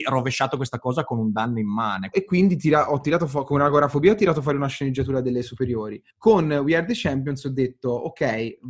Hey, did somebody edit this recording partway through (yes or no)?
yes